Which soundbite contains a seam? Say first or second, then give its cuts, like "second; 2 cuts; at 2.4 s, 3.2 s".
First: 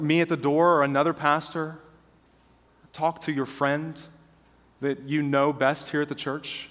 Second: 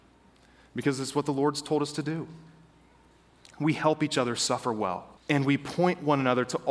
second; 1 cut; at 5.2 s